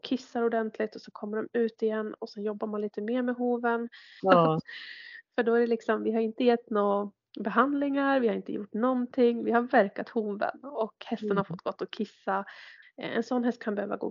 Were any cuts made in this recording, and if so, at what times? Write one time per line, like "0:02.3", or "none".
0:04.2
0:12.8